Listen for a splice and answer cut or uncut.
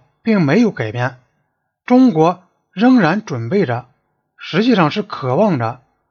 uncut